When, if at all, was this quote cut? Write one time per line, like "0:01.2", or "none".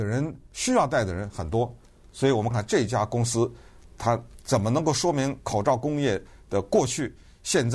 0:02.5